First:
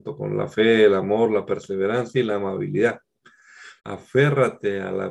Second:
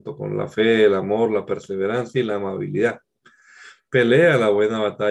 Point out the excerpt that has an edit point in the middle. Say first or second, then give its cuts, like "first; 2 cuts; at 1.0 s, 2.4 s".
first; 1 cut; at 3.8 s